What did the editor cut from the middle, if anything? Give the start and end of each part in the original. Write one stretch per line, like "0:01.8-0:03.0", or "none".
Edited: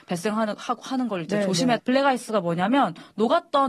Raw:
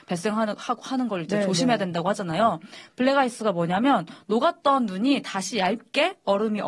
0:01.8-0:02.9